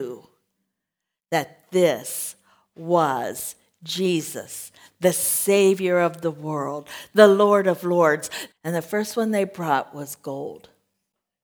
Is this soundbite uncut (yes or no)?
no